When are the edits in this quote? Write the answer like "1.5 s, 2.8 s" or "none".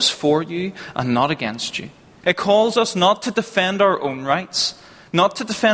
2.2 s